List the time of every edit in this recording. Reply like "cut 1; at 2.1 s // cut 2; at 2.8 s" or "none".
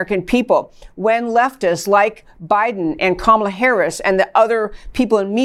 none